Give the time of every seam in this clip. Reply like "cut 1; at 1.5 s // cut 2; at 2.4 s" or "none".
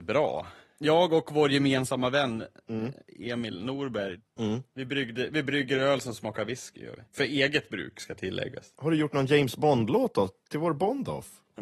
cut 1; at 7.1 s